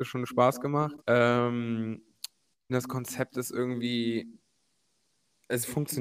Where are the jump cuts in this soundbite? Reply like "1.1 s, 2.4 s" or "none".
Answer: 1.0 s, 2.7 s